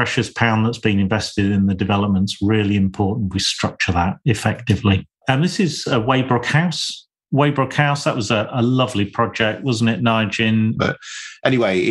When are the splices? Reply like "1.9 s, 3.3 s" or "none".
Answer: 5.2 s, 10.8 s